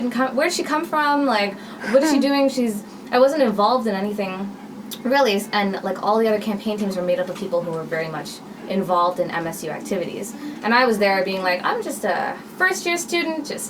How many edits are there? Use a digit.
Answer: 0